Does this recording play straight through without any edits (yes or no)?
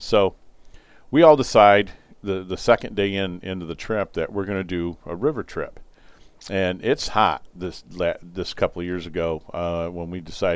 yes